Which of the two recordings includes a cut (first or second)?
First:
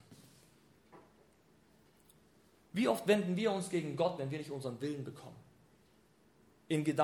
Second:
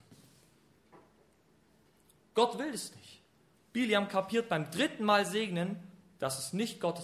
second